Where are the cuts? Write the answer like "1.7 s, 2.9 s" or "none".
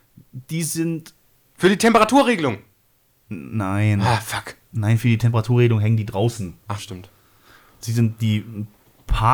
6.8 s